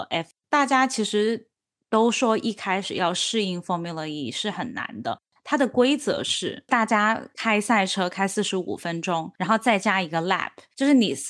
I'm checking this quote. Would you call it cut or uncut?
uncut